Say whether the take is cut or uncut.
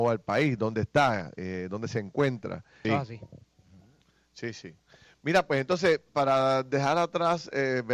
cut